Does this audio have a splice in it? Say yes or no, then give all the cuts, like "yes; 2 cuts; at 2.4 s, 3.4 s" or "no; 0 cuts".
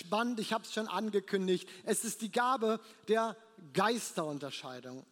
no; 0 cuts